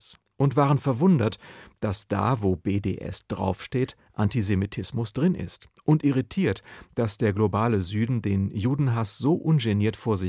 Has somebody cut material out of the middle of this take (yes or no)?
no